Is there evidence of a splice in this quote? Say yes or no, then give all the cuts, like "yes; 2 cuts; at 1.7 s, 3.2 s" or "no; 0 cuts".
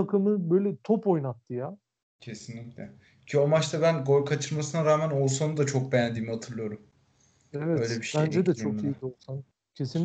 yes; 1 cut; at 2.0 s